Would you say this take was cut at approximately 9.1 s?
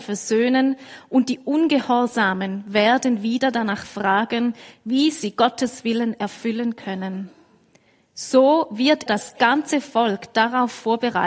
yes; 1 cut; at 9.1 s

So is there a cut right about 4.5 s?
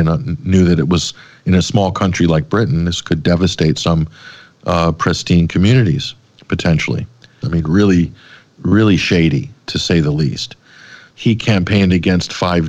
no; 2 cuts; at 7.4 s, 11.1 s

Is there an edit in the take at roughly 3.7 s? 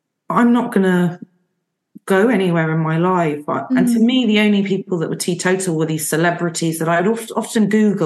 yes; 1 cut; at 3.7 s

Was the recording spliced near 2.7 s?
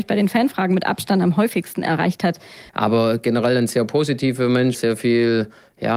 yes; 2 cuts; at 2.7 s, 4.7 s

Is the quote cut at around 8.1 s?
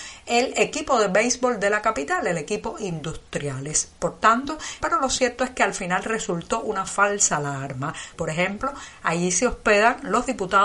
yes; 2 cuts; at 4.8 s, 8.1 s

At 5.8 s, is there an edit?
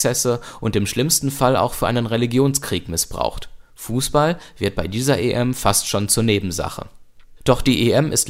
no; 0 cuts

